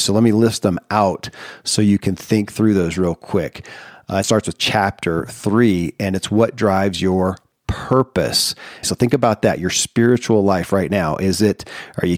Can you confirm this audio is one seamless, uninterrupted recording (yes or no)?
no